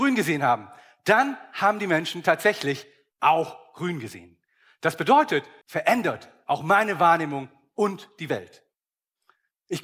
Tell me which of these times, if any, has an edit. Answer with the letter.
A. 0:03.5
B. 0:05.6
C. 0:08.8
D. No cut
B